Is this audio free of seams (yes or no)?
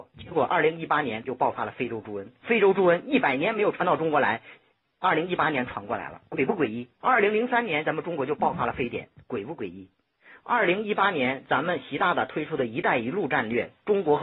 no